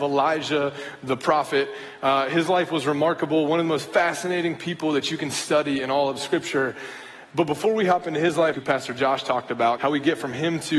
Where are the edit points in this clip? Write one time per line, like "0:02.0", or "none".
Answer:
0:08.5
0:09.8